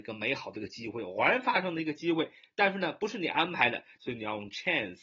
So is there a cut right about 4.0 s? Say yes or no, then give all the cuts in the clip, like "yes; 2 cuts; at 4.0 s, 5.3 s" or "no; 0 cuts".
yes; 1 cut; at 4.0 s